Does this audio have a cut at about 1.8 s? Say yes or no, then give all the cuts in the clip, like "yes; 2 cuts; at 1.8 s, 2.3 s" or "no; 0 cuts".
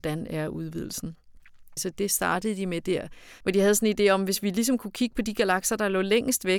yes; 2 cuts; at 1.8 s, 3.4 s